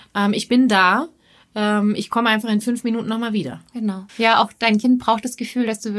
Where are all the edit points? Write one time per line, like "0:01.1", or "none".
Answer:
0:04.1